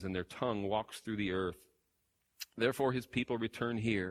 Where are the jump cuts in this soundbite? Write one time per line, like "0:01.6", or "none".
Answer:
none